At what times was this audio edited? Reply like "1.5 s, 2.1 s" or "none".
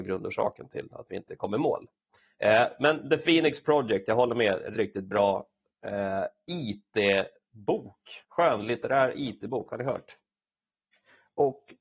4.7 s, 8.2 s